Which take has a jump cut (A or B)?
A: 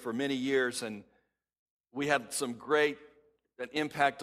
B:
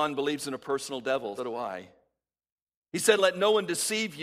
B